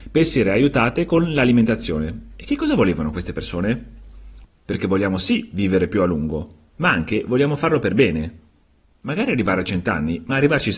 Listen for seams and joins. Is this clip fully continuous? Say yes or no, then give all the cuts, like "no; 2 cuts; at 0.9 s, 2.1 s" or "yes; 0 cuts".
no; 1 cut; at 4.4 s